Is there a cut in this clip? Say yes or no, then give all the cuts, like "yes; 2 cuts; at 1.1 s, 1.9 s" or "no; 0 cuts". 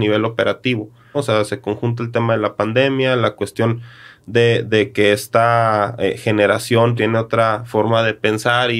yes; 2 cuts; at 1.1 s, 7.0 s